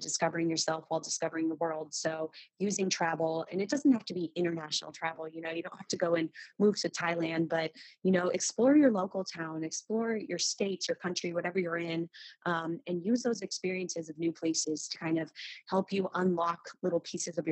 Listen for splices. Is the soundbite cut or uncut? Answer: uncut